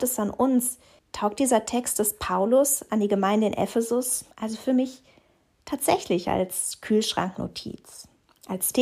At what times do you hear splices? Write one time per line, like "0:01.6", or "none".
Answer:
0:01.0
0:04.3